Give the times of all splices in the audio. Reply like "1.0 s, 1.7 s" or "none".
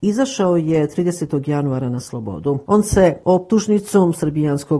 2.7 s